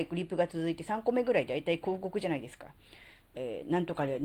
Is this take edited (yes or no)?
yes